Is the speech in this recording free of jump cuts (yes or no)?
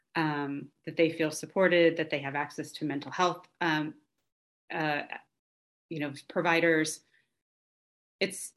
yes